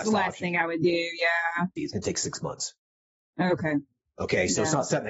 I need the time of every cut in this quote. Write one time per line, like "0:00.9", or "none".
0:01.8